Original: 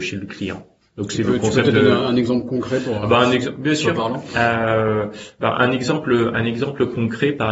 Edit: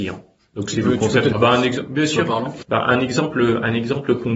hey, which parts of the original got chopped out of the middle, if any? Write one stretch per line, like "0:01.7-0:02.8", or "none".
0:01.7-0:03.0
0:04.3-0:05.3